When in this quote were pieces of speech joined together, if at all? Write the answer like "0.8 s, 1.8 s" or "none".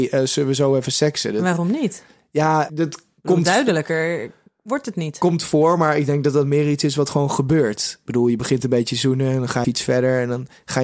2.7 s, 9.6 s